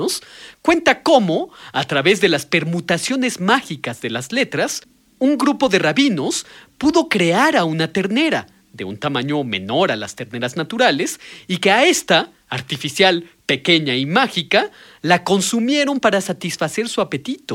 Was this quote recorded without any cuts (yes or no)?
yes